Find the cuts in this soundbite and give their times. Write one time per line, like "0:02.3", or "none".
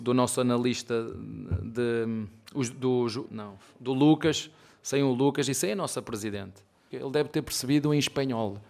0:03.3
0:06.9